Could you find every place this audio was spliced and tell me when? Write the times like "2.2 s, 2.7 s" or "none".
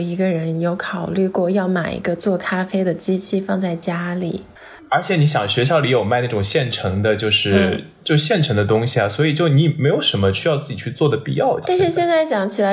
4.8 s, 11.6 s